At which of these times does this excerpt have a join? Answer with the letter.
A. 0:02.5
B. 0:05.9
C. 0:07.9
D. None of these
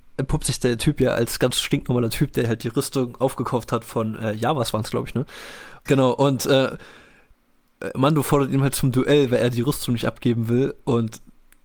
B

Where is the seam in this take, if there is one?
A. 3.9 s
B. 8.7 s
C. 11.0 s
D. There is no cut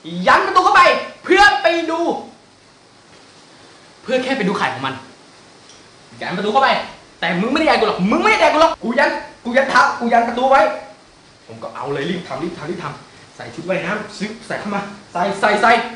B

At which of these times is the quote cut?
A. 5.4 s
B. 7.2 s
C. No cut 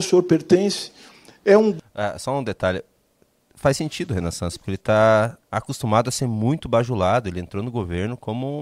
A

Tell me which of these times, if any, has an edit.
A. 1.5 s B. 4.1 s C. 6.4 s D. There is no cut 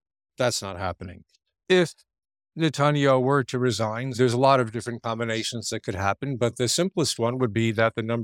B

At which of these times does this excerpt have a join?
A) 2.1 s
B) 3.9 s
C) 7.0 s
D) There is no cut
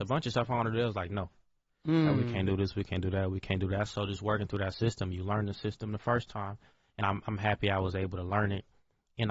D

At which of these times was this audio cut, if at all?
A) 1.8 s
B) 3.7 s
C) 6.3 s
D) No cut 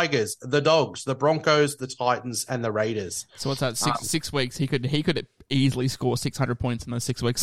A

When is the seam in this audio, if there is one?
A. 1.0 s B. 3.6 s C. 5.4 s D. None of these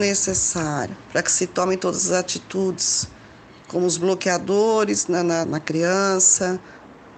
C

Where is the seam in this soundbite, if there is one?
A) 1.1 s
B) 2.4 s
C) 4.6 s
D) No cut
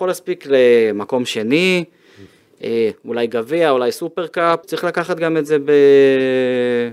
C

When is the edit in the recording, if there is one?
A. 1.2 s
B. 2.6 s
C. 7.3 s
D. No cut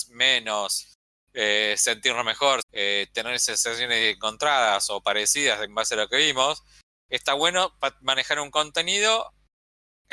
B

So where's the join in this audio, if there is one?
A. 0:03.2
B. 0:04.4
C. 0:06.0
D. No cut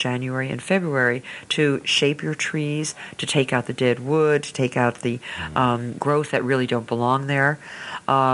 C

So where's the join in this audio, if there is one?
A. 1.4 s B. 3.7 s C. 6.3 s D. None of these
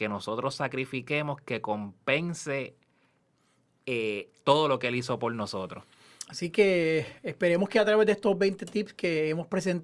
C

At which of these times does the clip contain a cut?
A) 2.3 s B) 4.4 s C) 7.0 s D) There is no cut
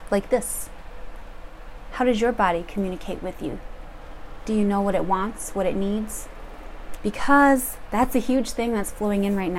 C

